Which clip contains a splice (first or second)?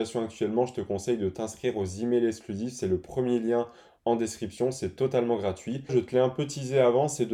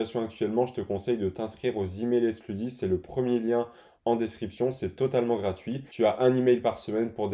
first